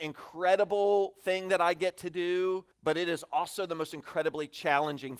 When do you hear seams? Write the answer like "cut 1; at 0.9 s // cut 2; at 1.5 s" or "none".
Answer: cut 1; at 2.7 s